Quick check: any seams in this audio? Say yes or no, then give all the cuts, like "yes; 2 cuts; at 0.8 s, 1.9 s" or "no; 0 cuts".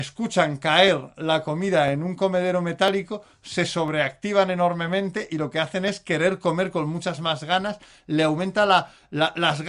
no; 0 cuts